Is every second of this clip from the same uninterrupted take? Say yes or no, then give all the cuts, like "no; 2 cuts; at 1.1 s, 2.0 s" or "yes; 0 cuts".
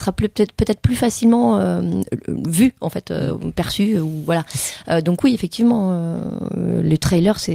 yes; 0 cuts